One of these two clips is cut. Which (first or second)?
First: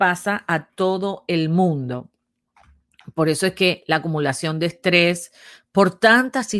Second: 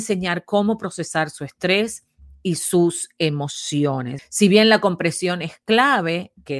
second